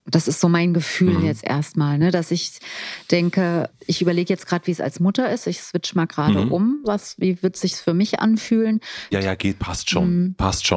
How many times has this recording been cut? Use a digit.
2